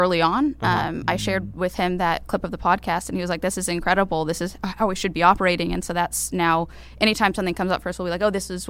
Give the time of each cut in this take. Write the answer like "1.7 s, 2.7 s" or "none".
none